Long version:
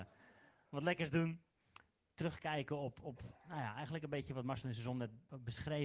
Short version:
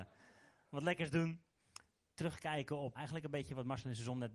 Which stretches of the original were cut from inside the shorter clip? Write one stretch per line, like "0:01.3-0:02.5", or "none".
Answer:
0:03.0-0:03.7